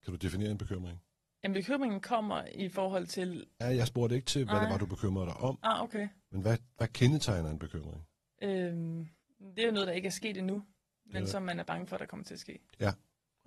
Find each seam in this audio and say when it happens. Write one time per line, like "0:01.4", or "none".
0:03.6